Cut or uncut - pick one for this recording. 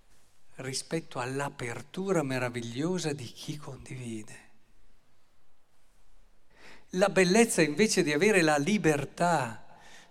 cut